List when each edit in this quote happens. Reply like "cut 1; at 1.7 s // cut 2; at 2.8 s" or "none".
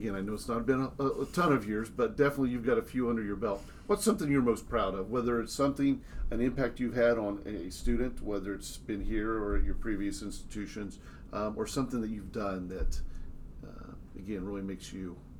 none

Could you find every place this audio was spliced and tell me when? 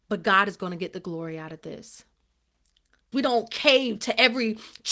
cut 1; at 3.1 s

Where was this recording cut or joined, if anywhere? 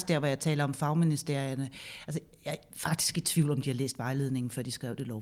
none

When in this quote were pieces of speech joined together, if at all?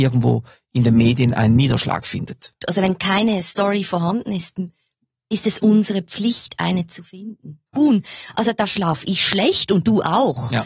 cut 1; at 2.6 s // cut 2; at 7.7 s

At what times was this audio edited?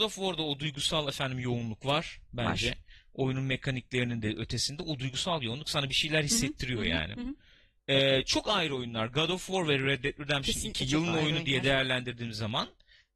cut 1; at 7.1 s

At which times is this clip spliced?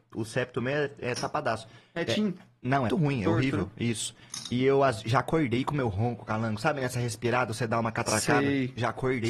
cut 1; at 2.9 s

